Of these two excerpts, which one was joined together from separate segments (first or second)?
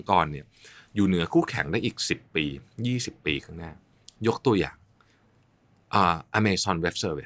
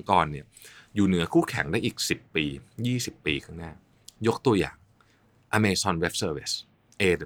second